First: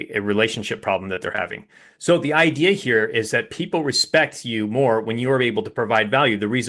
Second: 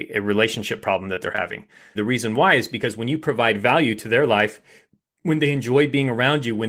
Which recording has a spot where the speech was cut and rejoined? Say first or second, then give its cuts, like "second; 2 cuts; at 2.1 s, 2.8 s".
second; 1 cut; at 2.0 s